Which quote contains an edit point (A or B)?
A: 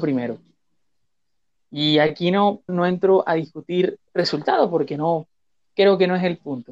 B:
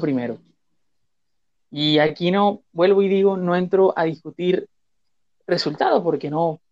A